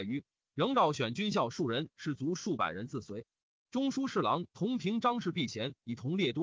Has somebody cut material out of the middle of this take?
no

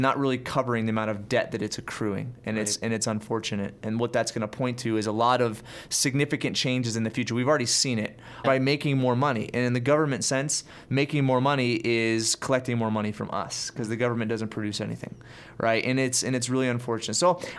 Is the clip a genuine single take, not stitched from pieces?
no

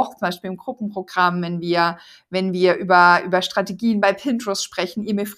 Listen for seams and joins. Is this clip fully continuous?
yes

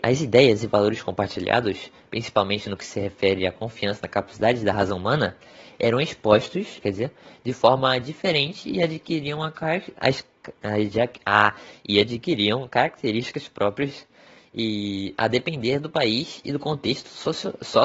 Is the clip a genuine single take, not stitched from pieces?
no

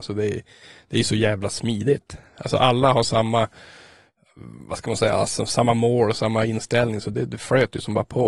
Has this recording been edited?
no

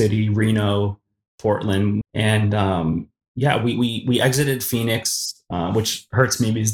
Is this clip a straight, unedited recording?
no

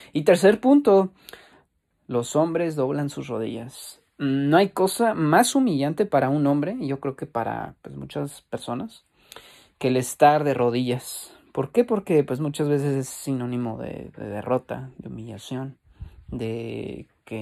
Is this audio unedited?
yes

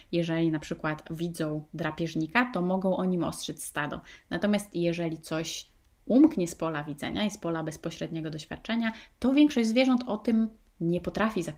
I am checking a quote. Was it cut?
no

